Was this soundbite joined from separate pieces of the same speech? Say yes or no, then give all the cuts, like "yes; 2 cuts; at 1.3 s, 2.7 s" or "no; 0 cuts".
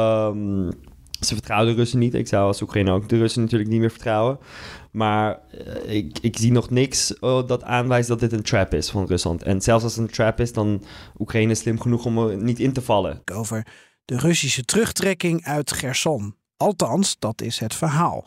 yes; 1 cut; at 13.2 s